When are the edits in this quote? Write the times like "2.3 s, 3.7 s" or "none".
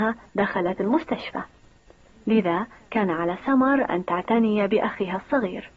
none